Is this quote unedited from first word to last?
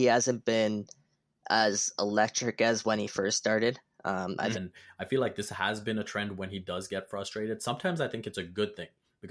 no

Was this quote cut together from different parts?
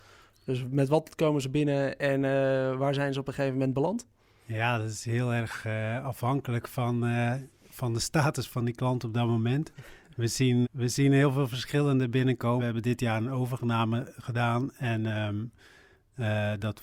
yes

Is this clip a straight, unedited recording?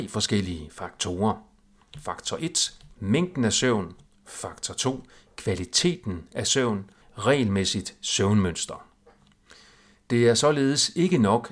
no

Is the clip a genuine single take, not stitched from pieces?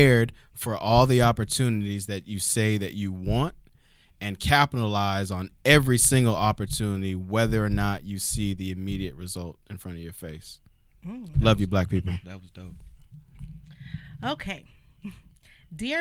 yes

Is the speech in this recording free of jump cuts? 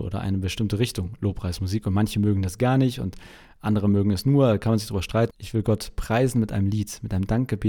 no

